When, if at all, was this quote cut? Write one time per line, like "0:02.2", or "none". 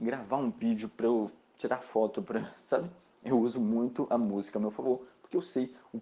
none